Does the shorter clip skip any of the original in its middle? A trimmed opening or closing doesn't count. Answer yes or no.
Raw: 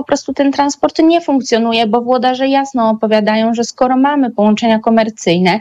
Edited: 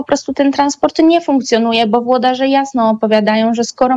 no